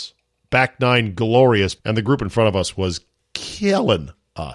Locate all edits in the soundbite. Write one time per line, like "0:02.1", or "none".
0:01.8